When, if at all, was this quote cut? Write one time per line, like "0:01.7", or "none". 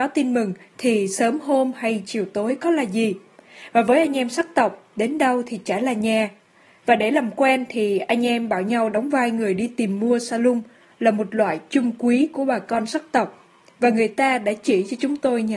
0:06.8